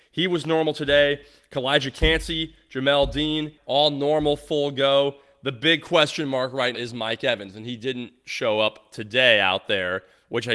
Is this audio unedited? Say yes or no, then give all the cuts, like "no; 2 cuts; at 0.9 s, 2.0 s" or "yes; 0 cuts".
no; 2 cuts; at 3.6 s, 6.7 s